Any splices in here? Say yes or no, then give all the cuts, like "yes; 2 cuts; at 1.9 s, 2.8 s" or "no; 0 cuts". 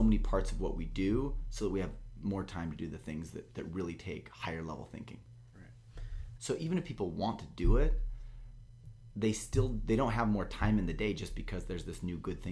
yes; 1 cut; at 6.4 s